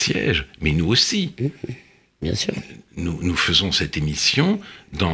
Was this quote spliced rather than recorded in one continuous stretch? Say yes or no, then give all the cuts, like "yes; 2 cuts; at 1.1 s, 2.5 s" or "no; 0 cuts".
no; 0 cuts